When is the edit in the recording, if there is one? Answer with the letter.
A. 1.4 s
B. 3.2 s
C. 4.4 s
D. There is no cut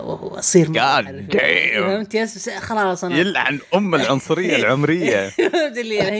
D